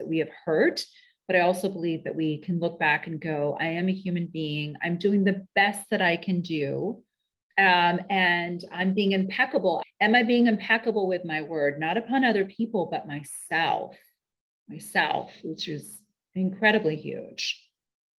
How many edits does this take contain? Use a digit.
1